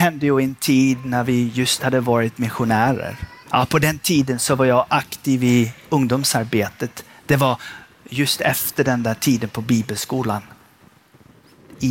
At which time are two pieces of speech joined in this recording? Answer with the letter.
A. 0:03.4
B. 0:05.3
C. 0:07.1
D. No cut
A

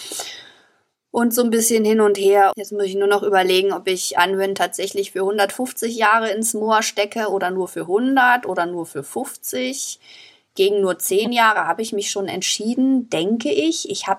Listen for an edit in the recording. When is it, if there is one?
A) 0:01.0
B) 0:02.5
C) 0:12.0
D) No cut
B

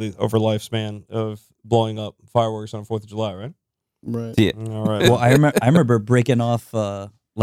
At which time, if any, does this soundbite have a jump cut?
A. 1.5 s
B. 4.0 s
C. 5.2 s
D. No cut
D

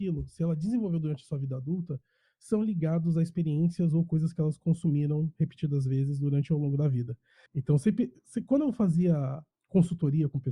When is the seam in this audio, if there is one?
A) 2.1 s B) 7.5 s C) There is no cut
B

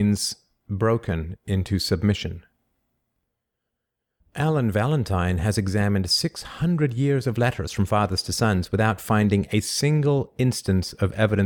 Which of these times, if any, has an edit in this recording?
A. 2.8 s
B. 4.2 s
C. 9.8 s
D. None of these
B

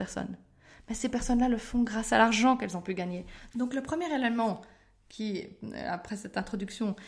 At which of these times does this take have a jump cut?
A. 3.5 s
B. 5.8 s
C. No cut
A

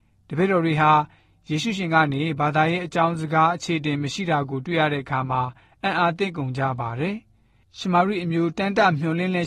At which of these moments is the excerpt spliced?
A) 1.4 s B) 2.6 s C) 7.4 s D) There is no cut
D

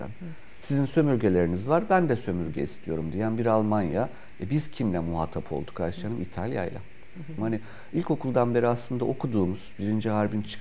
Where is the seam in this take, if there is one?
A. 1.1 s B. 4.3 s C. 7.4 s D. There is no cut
C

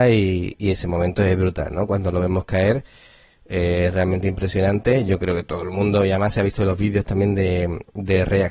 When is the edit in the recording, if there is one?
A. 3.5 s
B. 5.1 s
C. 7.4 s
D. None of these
D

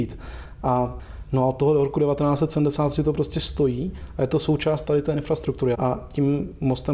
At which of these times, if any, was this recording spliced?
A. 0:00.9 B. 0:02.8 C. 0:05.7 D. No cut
C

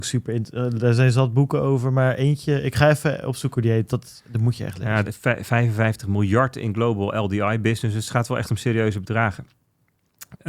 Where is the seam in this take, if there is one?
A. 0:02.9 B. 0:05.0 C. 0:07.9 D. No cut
B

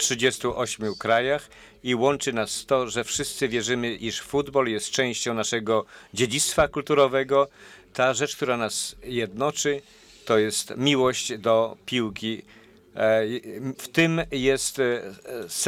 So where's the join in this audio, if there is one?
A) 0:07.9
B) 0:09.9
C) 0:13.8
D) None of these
C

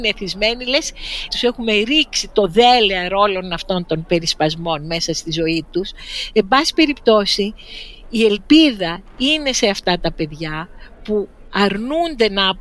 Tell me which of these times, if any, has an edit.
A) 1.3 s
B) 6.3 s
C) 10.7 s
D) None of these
A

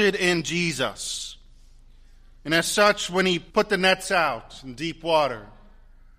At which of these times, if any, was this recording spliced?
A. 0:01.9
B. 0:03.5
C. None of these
B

